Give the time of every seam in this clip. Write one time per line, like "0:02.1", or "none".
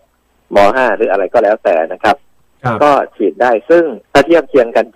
0:04.0